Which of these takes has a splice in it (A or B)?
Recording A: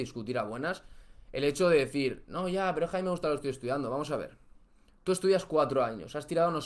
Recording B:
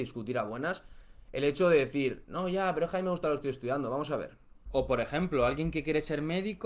B